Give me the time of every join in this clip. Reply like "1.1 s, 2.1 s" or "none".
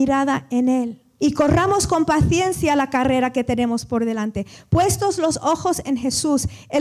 1.2 s